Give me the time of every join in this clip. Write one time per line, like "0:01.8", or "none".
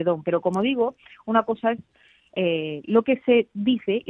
none